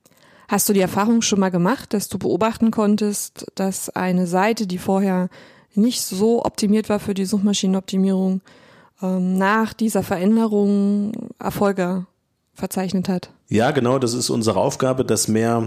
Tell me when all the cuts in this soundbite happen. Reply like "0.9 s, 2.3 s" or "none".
none